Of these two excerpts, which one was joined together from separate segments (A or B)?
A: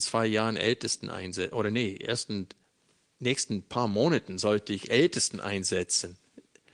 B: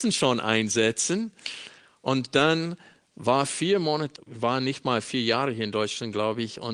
B